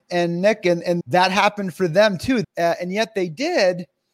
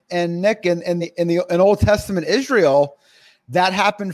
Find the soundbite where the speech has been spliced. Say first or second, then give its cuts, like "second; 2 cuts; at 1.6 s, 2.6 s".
first; 2 cuts; at 1.0 s, 2.4 s